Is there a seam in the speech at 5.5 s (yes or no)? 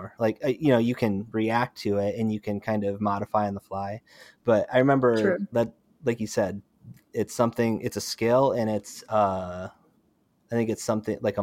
yes